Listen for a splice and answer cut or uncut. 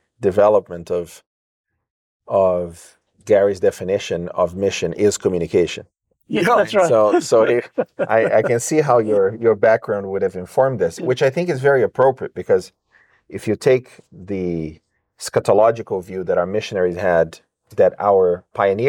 uncut